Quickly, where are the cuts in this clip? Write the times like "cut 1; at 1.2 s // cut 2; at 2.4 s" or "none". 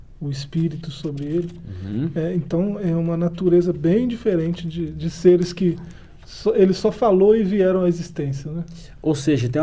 none

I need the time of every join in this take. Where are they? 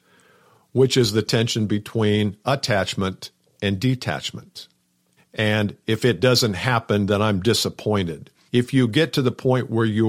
cut 1; at 5.2 s // cut 2; at 8.5 s

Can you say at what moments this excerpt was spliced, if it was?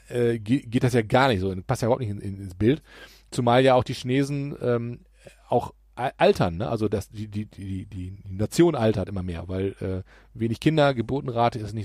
none

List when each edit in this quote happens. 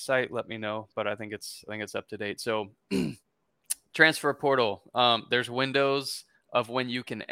none

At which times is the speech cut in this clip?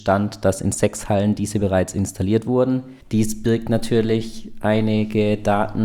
cut 1; at 3.0 s

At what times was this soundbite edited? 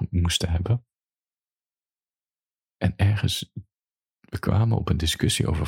none

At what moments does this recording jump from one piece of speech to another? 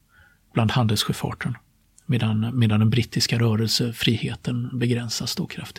none

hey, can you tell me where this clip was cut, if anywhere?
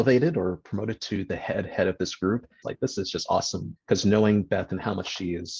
cut 1; at 2.6 s // cut 2; at 3.8 s

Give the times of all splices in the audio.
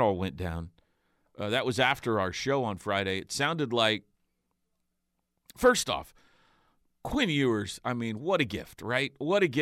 none

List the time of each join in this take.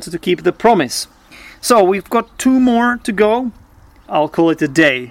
cut 1; at 4.1 s

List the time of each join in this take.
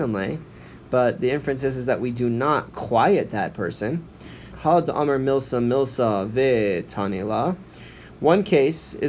cut 1; at 4.5 s

